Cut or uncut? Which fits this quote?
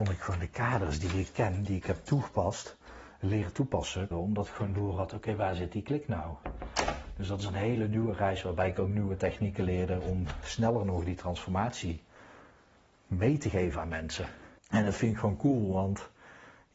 cut